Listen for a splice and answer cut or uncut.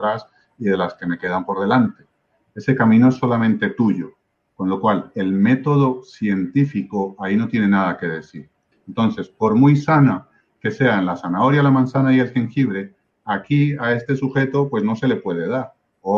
cut